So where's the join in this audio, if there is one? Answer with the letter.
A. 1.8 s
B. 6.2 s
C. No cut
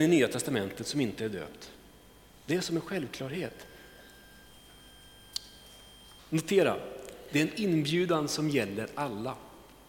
B